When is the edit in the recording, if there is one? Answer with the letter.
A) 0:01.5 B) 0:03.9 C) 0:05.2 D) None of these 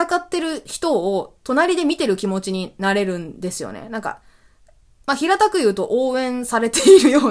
D